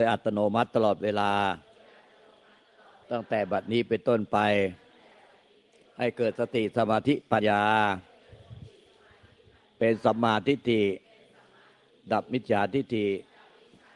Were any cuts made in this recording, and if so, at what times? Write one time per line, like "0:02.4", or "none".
0:07.4